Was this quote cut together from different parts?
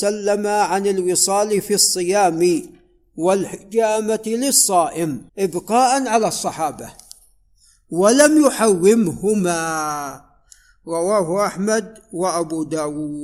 yes; 1 cut; at 5.3 s

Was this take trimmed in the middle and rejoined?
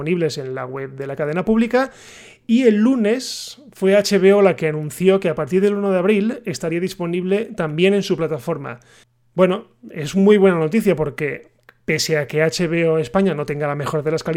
no; 0 cuts

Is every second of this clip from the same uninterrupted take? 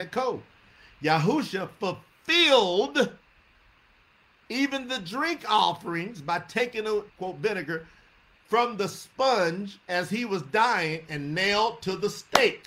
no; 1 cut; at 7.1 s

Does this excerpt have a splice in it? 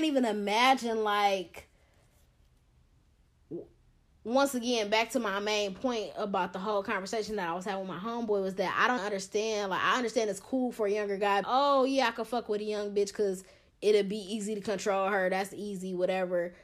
yes; 2 cuts; at 9.0 s, 11.4 s

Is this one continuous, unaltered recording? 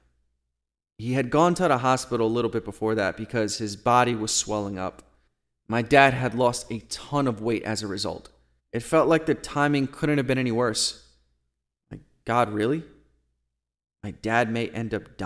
no; 1 cut; at 8.6 s

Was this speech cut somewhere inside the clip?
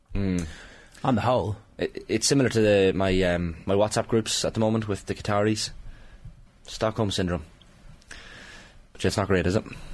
yes; 1 cut; at 6.5 s

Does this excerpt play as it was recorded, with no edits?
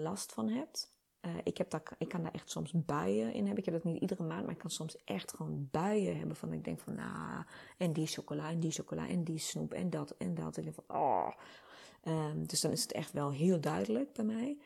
yes; 0 cuts

